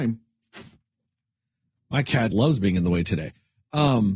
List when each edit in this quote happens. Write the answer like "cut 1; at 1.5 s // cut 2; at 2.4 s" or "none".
cut 1; at 2.3 s